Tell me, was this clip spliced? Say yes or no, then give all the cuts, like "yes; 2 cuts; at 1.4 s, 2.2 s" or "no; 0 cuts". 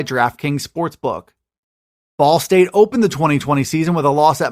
no; 0 cuts